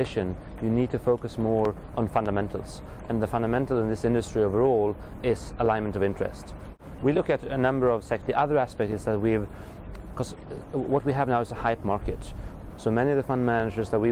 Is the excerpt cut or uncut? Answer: cut